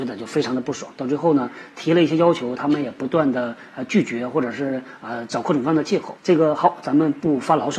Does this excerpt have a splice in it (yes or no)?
yes